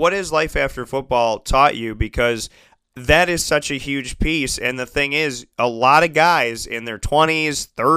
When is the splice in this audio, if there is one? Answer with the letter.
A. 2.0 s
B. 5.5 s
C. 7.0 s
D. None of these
B